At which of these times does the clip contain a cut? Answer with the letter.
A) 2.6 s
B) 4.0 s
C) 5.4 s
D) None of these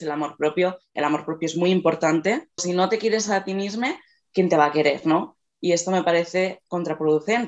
A